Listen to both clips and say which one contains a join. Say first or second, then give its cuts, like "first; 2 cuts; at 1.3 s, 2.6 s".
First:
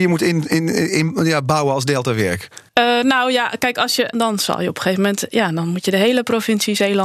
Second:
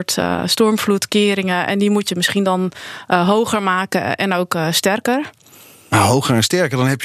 first; 2 cuts; at 2.7 s, 4.1 s